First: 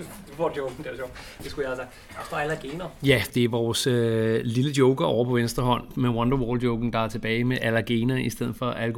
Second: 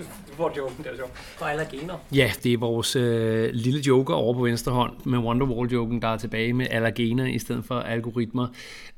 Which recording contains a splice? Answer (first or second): second